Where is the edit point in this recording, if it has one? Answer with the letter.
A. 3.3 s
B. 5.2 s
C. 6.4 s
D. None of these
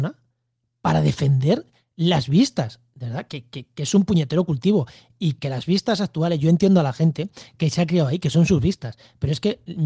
A